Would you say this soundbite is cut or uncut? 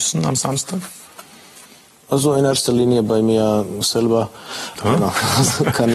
cut